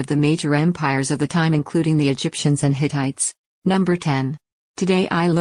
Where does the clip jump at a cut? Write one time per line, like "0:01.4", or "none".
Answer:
0:03.4